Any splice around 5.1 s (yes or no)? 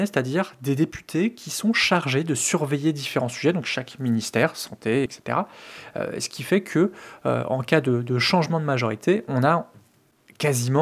yes